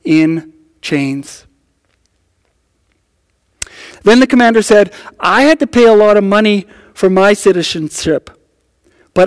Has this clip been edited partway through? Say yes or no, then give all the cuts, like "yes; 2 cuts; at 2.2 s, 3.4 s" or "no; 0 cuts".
yes; 1 cut; at 3.9 s